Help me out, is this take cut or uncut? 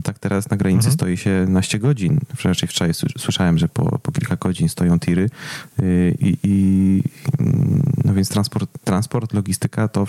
cut